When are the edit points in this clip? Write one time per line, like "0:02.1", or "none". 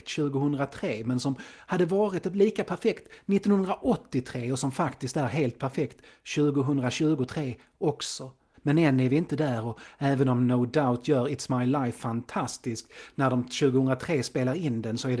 0:08.5